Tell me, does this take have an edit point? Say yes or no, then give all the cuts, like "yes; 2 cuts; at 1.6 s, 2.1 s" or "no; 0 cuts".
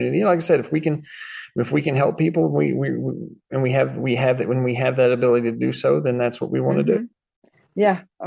no; 0 cuts